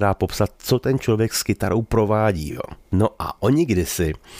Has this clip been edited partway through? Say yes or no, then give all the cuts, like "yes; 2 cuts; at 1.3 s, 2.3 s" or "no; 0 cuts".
no; 0 cuts